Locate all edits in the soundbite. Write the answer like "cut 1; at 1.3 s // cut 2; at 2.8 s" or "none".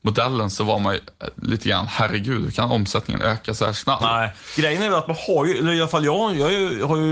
cut 1; at 4.0 s